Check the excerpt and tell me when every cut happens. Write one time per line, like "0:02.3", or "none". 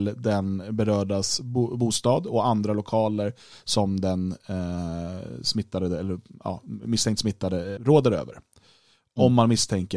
0:07.8